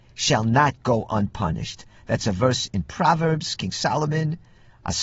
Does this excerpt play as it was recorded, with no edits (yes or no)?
yes